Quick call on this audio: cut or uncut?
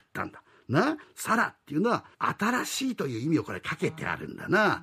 cut